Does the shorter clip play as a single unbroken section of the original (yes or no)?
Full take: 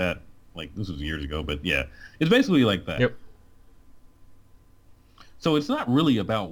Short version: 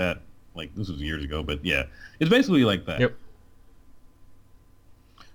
yes